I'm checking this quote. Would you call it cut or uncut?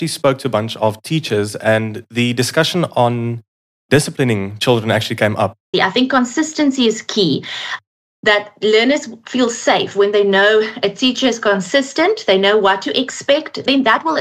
cut